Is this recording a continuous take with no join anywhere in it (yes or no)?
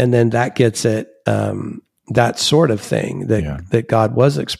no